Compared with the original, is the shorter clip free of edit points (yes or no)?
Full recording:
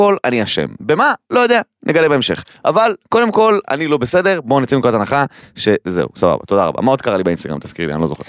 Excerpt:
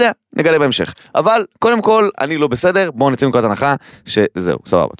yes